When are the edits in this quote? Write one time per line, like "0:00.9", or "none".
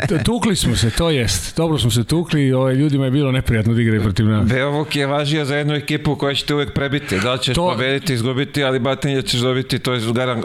none